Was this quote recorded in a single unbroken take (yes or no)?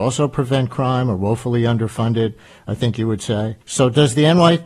no